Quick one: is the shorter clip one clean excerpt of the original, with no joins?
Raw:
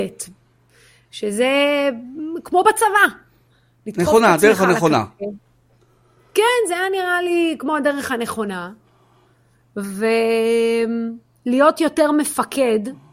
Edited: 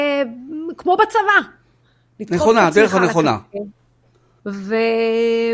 no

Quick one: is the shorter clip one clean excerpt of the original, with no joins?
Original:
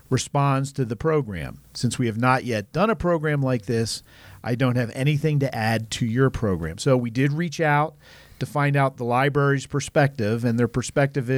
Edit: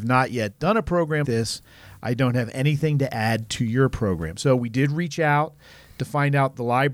no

